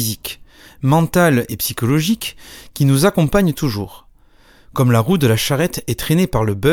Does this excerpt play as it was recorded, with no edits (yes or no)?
yes